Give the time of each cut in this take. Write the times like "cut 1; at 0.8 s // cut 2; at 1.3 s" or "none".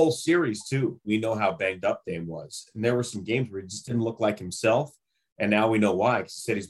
cut 1; at 1.0 s